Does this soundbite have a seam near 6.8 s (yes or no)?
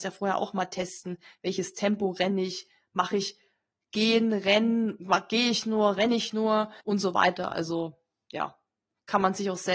yes